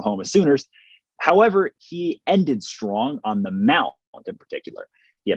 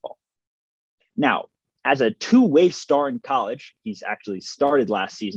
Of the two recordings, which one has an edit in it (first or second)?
second